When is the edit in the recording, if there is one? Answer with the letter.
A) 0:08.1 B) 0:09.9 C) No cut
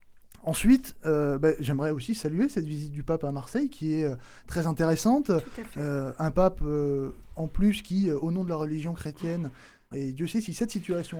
B